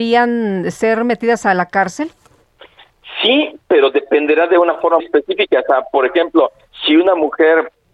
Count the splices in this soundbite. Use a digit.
2